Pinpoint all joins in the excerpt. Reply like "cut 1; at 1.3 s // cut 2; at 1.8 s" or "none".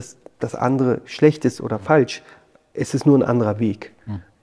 none